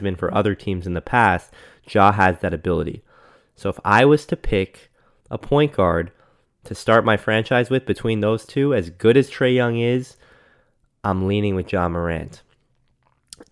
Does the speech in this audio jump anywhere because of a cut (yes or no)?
no